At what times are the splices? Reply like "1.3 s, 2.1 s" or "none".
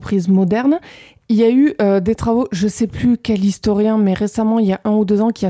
1.2 s